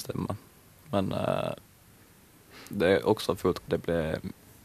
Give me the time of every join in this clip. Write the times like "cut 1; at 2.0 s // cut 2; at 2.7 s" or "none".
cut 1; at 3.7 s